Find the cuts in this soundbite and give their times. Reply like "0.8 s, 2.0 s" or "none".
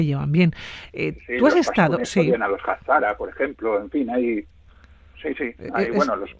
none